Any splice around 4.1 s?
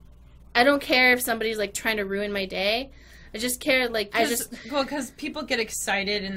yes; 1 cut; at 4.1 s

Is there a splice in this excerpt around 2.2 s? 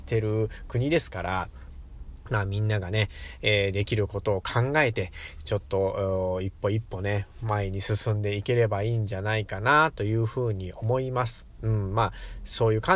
no; 1 cut; at 11.6 s

